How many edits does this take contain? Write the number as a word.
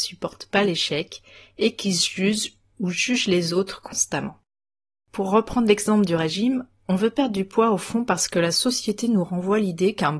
one